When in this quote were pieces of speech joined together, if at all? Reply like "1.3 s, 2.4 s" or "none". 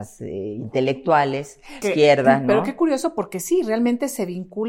1.8 s